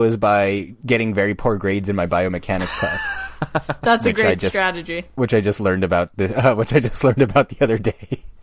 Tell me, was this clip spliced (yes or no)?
no